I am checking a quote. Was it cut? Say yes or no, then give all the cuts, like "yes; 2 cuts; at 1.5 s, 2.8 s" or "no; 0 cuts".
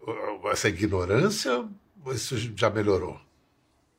no; 0 cuts